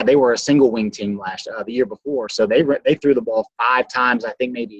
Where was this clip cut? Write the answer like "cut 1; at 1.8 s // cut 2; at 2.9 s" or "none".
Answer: none